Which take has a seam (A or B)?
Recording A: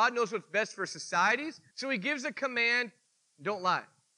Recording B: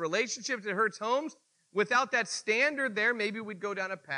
A